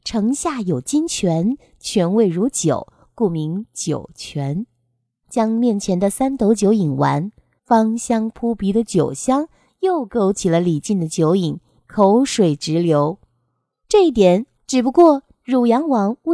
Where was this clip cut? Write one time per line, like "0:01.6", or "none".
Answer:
0:05.2
0:07.6
0:14.5